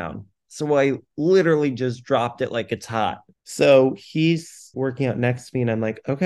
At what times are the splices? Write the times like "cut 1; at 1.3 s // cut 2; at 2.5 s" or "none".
cut 1; at 3.3 s // cut 2; at 4.7 s